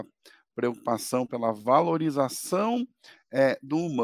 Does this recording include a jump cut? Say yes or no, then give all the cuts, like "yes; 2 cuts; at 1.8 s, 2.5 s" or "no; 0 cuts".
no; 0 cuts